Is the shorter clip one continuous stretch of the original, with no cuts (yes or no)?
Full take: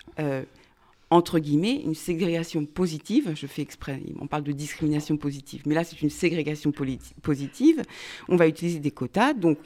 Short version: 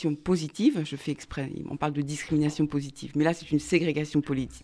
yes